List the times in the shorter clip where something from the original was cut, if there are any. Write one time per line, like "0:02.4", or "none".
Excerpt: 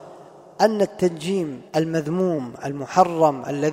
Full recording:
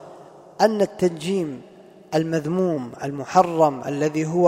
0:01.7